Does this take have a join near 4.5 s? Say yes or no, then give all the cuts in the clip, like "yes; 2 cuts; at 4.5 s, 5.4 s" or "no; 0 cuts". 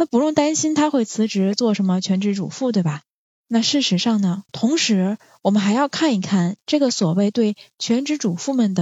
yes; 2 cuts; at 3.3 s, 4.5 s